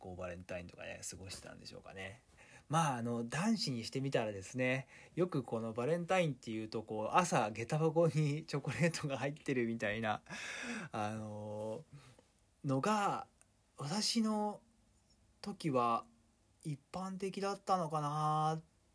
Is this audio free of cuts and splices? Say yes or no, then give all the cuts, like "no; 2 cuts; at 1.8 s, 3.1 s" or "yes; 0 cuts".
yes; 0 cuts